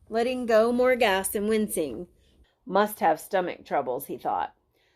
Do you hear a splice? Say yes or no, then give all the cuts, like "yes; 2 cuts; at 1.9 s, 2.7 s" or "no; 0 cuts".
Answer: yes; 1 cut; at 2.4 s